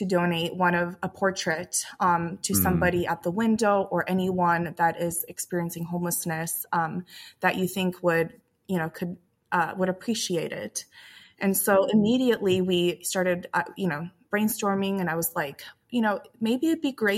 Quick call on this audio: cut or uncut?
uncut